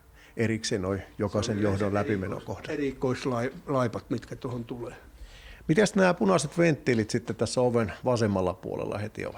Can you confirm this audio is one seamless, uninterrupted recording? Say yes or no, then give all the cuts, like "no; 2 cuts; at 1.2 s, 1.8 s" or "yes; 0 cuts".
yes; 0 cuts